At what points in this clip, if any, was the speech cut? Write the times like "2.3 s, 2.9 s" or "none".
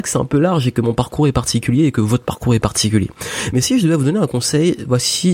none